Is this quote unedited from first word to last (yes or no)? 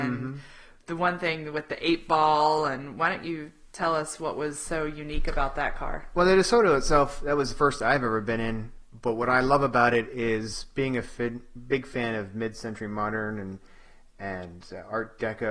yes